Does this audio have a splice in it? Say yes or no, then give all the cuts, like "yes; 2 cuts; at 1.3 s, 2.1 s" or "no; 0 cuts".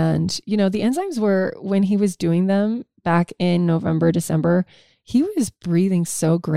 no; 0 cuts